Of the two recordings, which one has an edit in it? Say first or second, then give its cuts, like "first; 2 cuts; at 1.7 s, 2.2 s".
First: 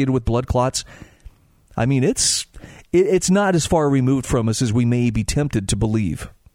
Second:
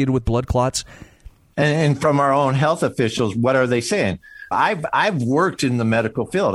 second; 2 cuts; at 1.5 s, 4.5 s